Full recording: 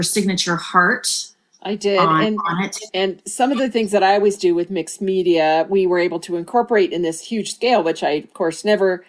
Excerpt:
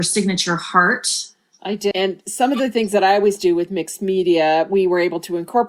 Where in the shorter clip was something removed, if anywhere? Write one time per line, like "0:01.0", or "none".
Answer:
0:01.9